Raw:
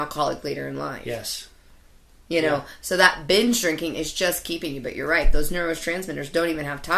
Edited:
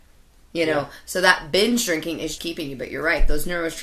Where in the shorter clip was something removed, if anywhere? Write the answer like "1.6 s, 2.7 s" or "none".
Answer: 2.4 s